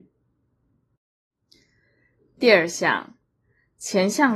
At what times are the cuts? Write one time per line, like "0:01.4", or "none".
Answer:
none

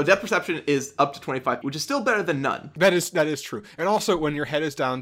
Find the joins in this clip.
0:01.6

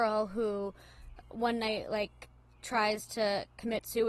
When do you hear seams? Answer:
0:01.2

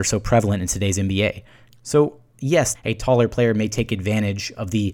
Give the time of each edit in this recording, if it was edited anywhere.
0:01.7
0:02.8

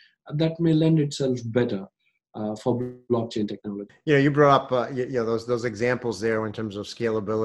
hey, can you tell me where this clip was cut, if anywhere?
0:03.9

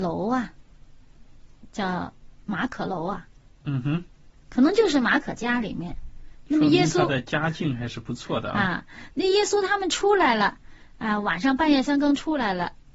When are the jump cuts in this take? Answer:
none

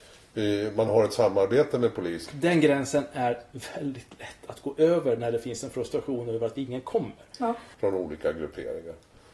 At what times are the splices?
0:02.3
0:07.7

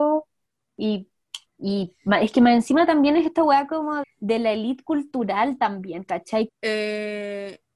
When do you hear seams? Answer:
0:01.5
0:04.0
0:06.5

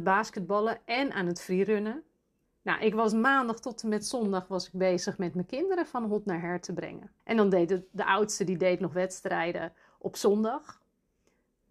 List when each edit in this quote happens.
0:02.5
0:07.2

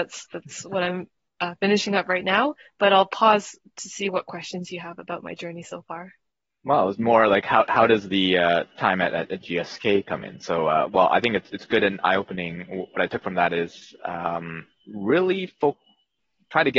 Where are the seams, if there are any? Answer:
none

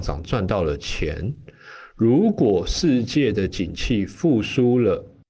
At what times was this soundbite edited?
none

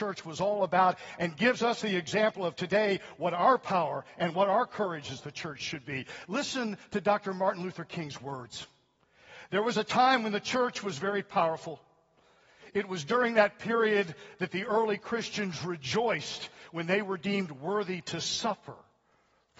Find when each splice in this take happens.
none

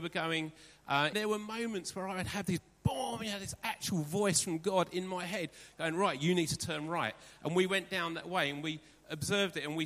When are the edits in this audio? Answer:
0:01.1

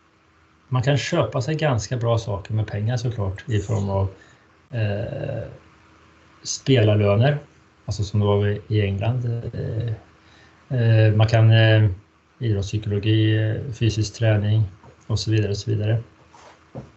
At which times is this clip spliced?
0:12.3

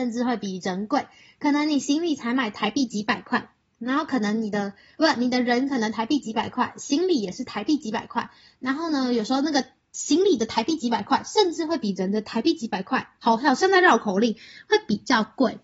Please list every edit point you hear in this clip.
none

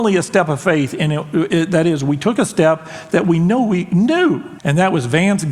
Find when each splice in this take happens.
0:04.6

